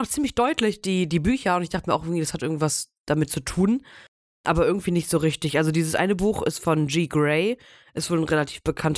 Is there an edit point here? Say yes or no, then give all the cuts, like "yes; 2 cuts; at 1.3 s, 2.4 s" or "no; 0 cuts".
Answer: no; 0 cuts